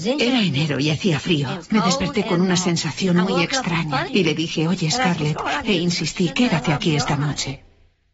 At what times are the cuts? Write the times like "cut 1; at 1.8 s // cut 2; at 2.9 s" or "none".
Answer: cut 1; at 4.1 s // cut 2; at 5.6 s